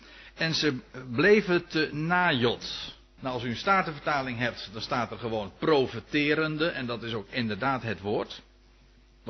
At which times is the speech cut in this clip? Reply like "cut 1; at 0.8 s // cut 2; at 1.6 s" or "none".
cut 1; at 3.2 s